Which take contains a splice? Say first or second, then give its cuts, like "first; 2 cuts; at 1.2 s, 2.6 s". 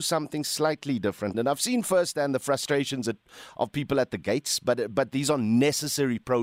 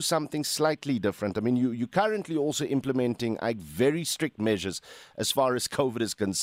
first; 1 cut; at 1.3 s